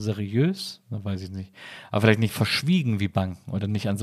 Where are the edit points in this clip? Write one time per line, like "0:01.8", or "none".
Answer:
0:02.3